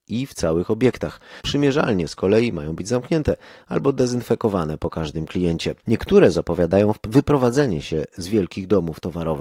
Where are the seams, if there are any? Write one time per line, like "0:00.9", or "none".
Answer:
0:01.4
0:05.8